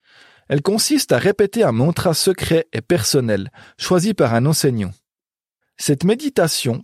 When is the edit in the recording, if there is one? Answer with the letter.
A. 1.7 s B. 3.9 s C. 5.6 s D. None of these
C